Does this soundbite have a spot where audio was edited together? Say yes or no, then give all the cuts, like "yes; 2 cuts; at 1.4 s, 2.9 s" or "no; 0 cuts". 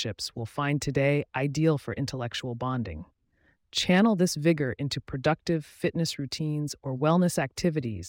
yes; 1 cut; at 3.5 s